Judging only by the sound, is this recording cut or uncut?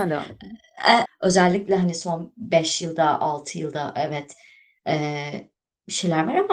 cut